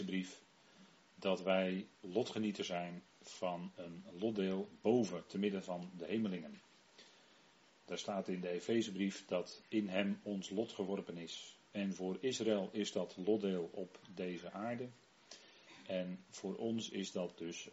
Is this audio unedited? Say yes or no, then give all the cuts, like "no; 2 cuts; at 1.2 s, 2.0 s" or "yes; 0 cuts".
no; 1 cut; at 11.7 s